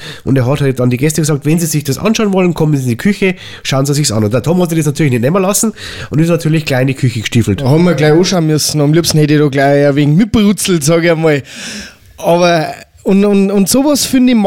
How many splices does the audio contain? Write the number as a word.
zero